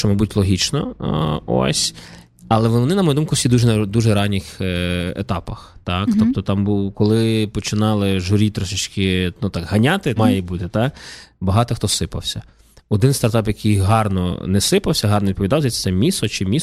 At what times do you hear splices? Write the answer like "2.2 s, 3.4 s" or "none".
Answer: 10.2 s

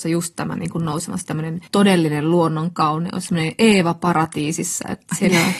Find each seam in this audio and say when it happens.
1.7 s

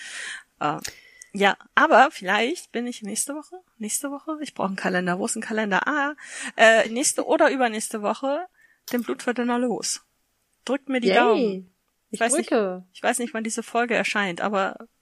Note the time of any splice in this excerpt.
6.8 s

